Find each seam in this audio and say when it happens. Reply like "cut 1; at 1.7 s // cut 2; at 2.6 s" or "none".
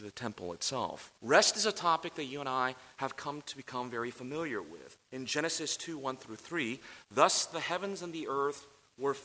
cut 1; at 1.2 s // cut 2; at 5.0 s